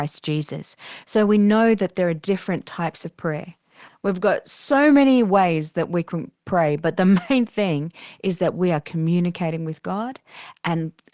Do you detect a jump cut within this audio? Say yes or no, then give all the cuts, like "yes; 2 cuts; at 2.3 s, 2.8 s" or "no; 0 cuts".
yes; 1 cut; at 3.9 s